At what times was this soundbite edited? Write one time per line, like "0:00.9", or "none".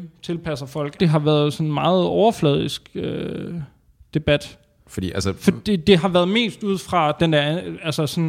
0:01.0